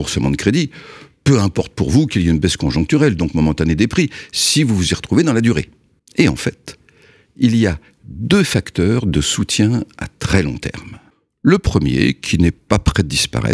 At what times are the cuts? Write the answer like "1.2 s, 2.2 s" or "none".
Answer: none

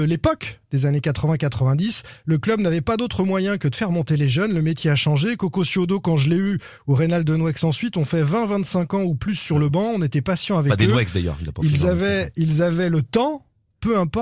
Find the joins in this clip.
none

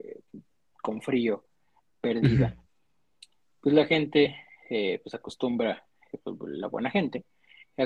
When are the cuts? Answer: none

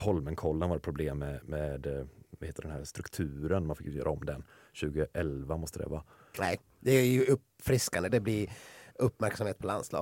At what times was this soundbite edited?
6.3 s, 8.1 s

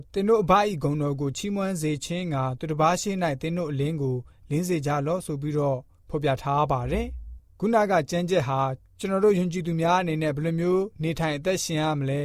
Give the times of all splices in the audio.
none

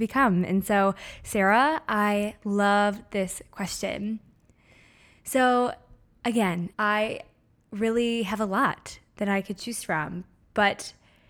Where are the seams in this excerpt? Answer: 6.7 s

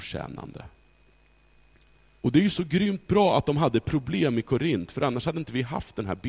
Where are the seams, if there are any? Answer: 2.2 s

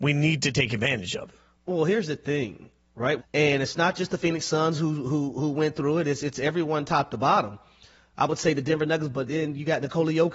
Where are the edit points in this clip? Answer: 3.2 s

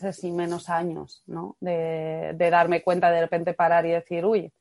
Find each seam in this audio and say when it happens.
none

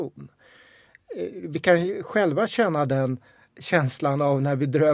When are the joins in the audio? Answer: none

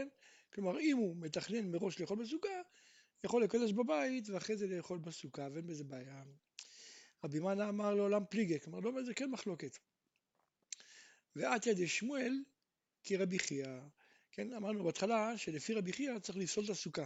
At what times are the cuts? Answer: none

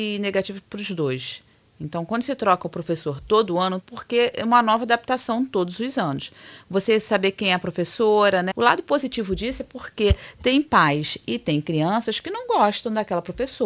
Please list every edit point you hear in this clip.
3.8 s, 8.5 s

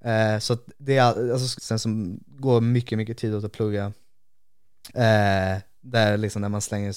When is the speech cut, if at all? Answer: 1.6 s, 4.9 s

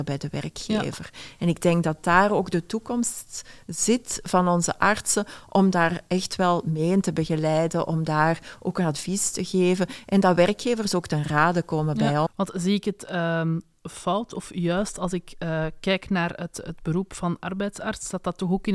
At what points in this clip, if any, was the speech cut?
12.3 s

